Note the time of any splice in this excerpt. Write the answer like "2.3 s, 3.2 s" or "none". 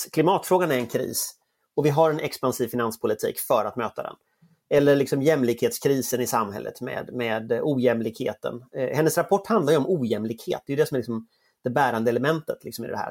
none